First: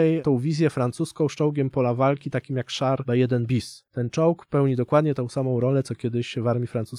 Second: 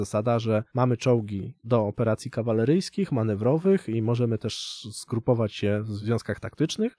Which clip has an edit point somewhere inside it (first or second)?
first